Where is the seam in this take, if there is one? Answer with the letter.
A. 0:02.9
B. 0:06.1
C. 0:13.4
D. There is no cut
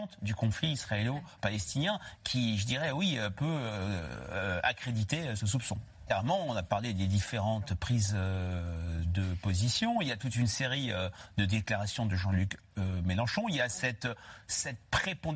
B